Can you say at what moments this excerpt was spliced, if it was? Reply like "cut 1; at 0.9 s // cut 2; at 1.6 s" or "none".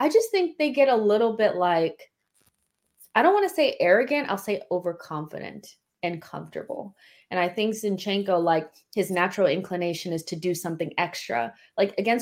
none